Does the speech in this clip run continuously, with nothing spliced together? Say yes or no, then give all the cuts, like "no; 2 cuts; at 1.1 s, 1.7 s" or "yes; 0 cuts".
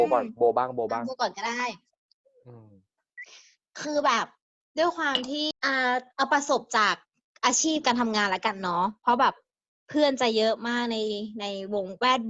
no; 1 cut; at 5.5 s